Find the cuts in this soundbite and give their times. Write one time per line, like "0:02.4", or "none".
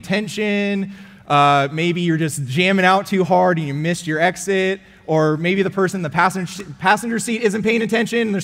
none